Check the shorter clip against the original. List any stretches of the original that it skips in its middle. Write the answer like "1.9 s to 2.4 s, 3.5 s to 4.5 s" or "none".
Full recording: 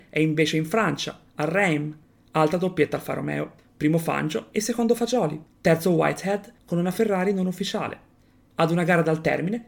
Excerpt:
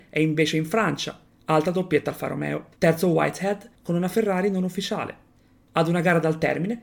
1.3 s to 2.1 s, 3.6 s to 5.6 s